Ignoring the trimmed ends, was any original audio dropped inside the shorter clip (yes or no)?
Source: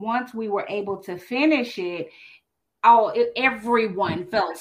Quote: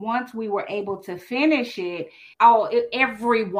yes